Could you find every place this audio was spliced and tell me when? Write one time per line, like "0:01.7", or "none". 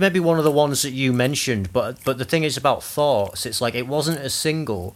none

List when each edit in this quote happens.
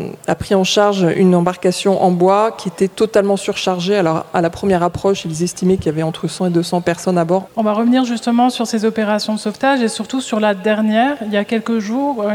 0:07.5

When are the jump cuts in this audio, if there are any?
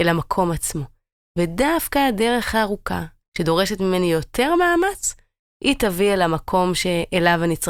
0:03.2

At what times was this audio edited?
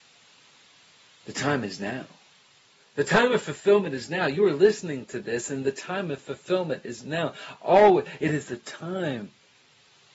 none

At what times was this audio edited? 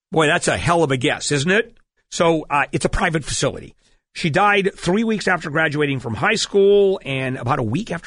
0:02.0

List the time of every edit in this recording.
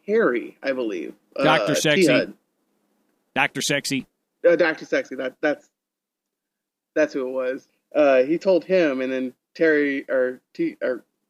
none

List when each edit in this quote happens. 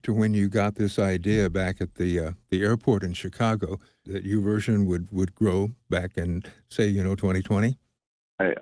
0:04.0
0:07.2

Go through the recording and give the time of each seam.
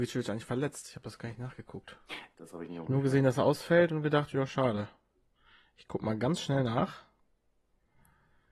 0:02.3

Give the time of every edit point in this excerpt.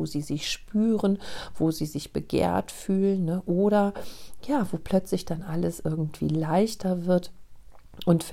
none

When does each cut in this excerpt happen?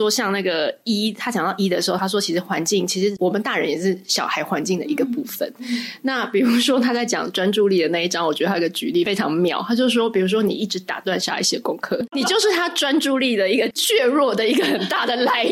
none

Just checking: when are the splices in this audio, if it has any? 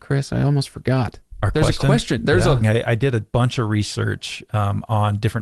0:02.6

